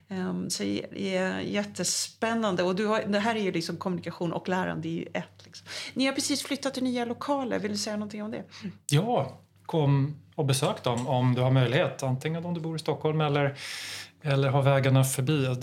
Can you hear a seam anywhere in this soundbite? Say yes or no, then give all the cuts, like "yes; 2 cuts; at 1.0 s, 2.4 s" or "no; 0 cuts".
no; 0 cuts